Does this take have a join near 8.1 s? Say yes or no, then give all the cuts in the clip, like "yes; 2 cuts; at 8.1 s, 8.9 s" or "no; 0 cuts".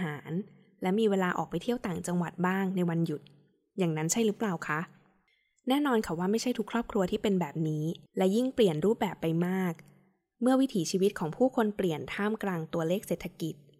yes; 1 cut; at 8.1 s